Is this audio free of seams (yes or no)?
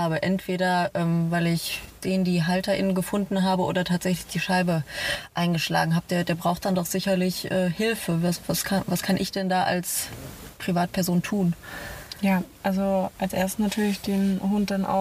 yes